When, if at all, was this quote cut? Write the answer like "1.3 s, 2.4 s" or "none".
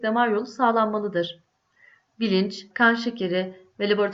2.7 s